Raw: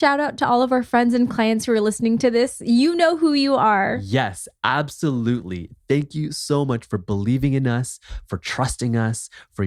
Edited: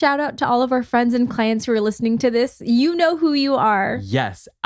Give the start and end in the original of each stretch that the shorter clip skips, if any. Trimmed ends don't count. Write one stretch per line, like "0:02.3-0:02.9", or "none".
none

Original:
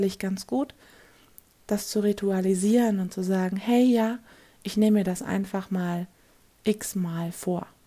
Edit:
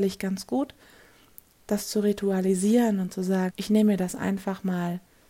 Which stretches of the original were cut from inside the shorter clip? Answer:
0:03.5-0:04.6

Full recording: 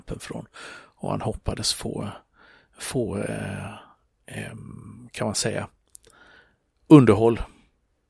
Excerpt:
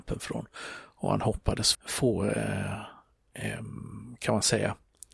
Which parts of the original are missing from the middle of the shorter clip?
0:01.7-0:02.7

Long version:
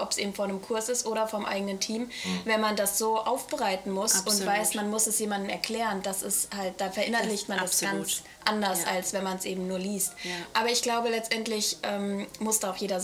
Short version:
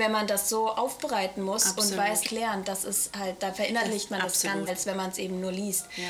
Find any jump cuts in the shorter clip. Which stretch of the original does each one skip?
0:04.7-0:05.6
0:08.0-0:08.9

